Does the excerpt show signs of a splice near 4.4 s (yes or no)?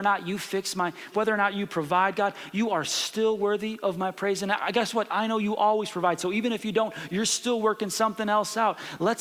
no